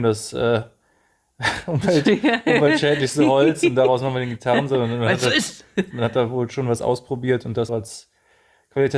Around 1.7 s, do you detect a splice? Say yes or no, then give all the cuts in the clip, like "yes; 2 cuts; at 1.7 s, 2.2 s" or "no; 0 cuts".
no; 2 cuts; at 5.9 s, 7.7 s